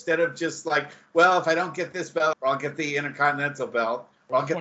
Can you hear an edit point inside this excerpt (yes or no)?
yes